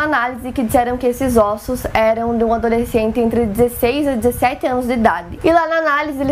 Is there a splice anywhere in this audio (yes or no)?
yes